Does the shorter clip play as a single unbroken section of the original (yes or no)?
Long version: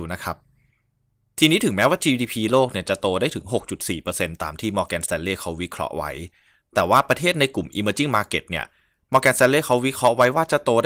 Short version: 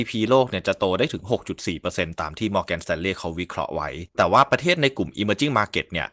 no